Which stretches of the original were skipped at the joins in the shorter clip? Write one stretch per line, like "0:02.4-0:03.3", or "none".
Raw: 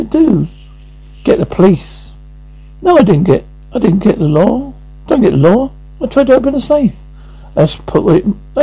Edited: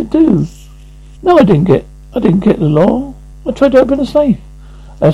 0:01.2-0:02.7
0:04.9-0:05.9